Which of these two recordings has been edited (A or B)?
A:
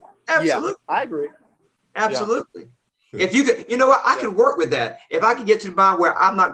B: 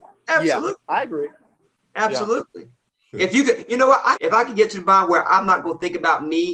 B